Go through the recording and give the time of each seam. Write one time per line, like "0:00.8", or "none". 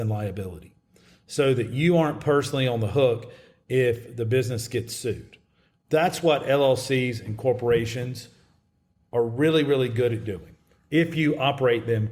none